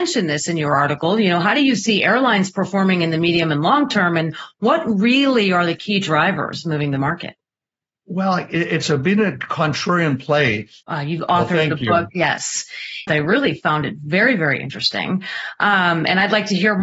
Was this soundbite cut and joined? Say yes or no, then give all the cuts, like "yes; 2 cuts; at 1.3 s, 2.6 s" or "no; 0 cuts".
yes; 2 cuts; at 10.8 s, 13.1 s